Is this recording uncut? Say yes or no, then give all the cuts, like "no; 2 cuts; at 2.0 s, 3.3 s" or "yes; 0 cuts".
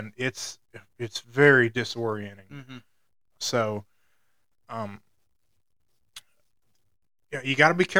no; 1 cut; at 3.4 s